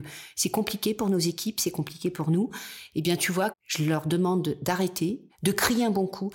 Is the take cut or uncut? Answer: cut